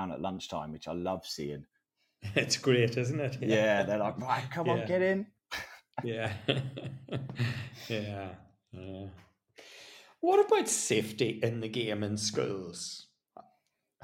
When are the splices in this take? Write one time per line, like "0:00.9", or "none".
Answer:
none